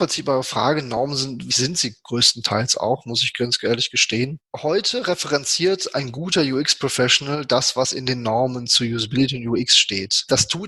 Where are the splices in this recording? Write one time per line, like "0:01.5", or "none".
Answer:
0:01.5